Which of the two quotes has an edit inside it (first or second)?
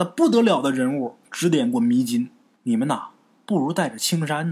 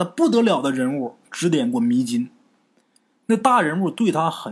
first